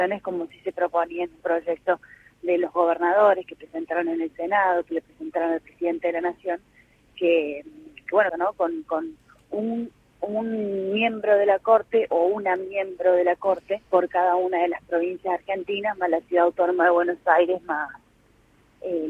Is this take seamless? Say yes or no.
no